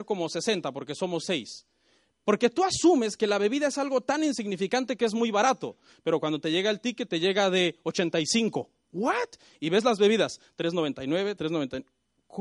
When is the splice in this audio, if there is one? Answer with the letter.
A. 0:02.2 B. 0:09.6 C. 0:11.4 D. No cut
C